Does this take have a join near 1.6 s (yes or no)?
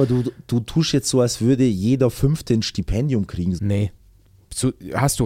no